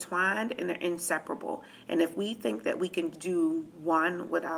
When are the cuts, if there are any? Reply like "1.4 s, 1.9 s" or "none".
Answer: 3.1 s